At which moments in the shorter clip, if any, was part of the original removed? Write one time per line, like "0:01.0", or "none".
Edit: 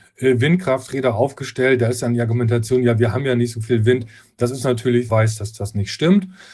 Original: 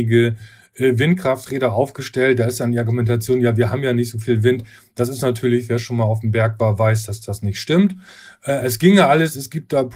0:05.1